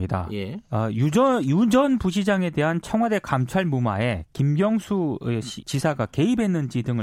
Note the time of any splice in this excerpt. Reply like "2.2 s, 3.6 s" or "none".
5.6 s

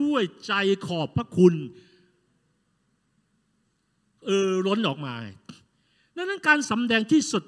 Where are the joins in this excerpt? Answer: none

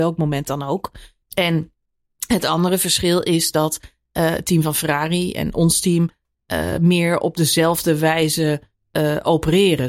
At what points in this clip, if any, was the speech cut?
1.2 s

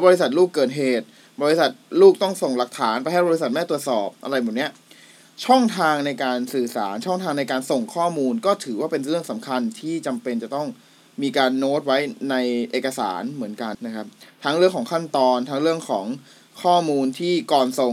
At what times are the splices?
13.7 s

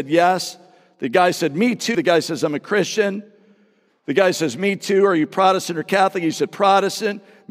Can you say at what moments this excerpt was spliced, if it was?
1.9 s

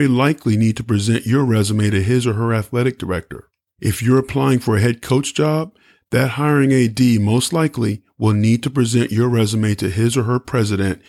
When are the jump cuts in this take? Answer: none

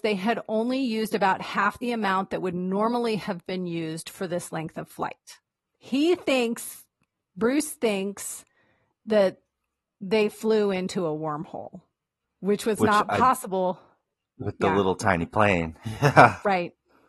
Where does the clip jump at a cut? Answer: 5.6 s, 12.2 s

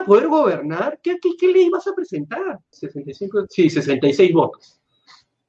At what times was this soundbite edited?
2.7 s

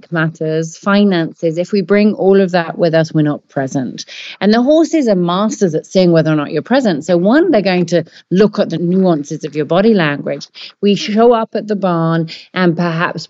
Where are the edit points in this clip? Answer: 10.7 s

